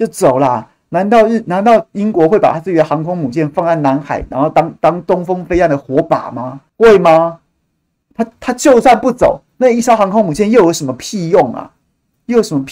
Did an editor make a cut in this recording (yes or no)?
yes